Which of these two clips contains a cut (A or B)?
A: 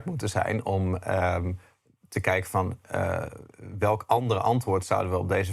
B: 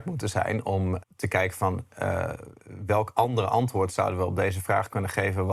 B